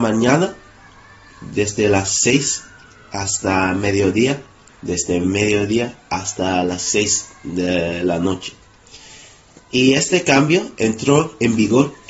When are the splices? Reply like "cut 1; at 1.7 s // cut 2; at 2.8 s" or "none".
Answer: cut 1; at 4.7 s